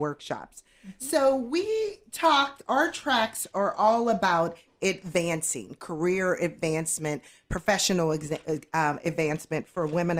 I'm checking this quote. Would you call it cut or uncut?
uncut